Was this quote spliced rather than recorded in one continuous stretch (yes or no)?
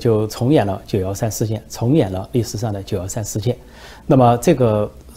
yes